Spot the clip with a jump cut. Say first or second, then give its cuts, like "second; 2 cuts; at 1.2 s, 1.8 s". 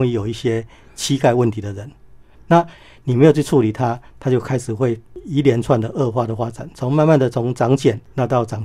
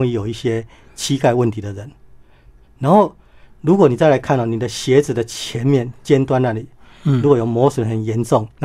first; 1 cut; at 2.3 s